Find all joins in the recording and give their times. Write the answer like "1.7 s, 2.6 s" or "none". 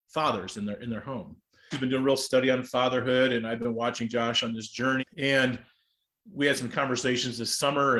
1.7 s, 5.0 s